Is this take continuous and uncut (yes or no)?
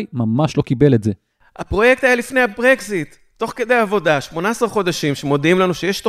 yes